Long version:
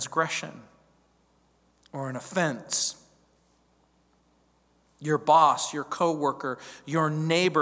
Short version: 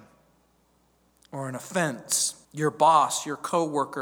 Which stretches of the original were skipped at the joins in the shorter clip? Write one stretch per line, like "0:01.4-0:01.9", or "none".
0:03.1-0:04.9

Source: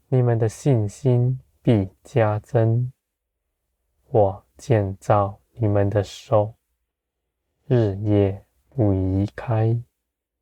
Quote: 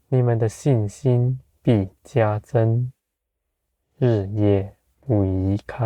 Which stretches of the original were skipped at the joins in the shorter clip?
0:03.8-0:07.5

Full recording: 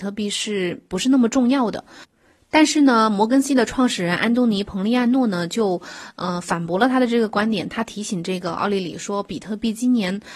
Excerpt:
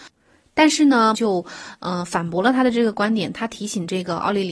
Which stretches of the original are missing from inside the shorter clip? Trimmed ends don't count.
0:03.1-0:05.5

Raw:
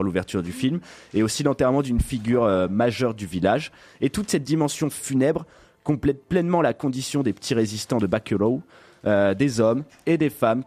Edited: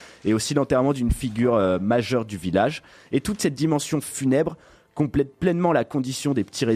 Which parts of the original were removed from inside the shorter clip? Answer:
none

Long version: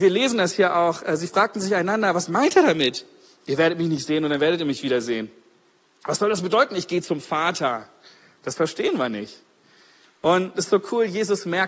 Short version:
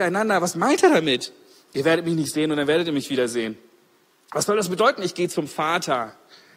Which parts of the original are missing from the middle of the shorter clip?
none

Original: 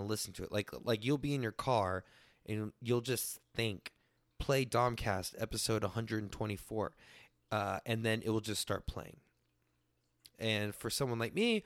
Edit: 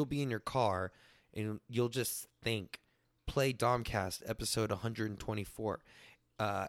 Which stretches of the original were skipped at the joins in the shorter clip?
none

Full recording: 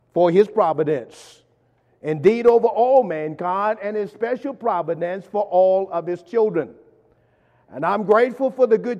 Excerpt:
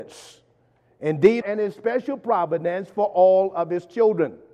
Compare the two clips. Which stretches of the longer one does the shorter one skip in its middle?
0:02.4-0:03.8

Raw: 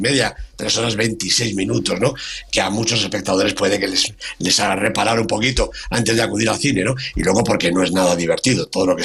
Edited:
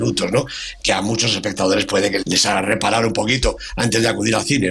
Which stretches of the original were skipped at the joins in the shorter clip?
0:03.9-0:04.4

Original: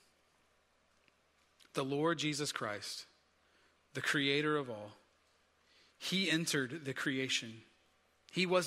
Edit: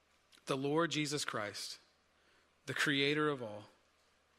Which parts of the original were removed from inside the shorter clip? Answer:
none

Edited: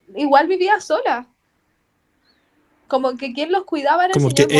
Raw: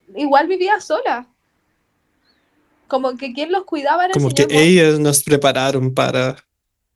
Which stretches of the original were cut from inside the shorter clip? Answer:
none

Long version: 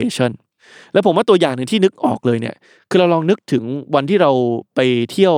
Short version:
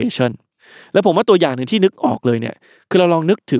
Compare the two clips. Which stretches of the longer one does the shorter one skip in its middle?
none

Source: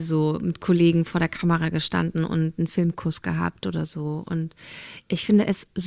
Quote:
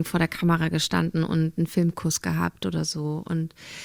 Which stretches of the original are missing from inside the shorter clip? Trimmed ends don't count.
none

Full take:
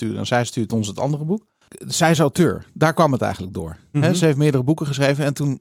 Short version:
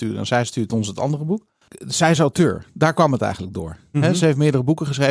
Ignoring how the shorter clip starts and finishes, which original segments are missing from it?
none

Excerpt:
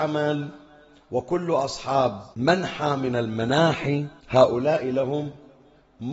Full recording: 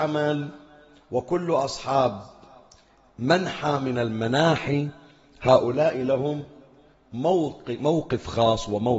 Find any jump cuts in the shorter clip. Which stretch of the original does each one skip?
0:02.3-0:03.1
0:05.0-0:05.3

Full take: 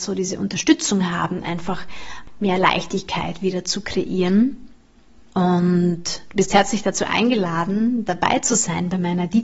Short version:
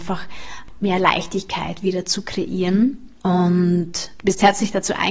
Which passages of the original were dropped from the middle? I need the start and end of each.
0:04.7-0:05.3

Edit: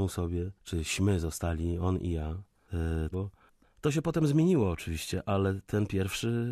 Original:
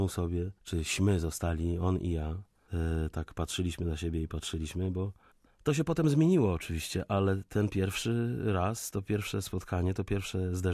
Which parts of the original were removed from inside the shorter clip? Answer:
0:03.1-0:04.9

